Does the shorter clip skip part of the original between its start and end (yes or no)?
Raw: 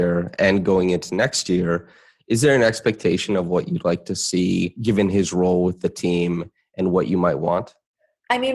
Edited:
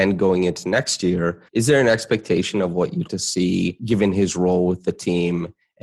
yes